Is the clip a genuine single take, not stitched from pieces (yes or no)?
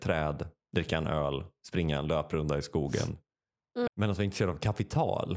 no